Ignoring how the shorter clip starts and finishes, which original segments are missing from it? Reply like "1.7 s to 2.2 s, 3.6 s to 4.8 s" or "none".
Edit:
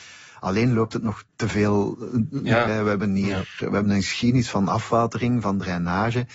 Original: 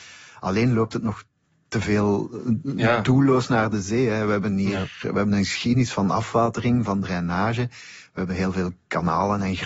1.3 s to 1.6 s, 3.0 s to 4.1 s